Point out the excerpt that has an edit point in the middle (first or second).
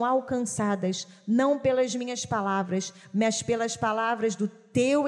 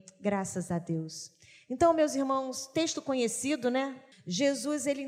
second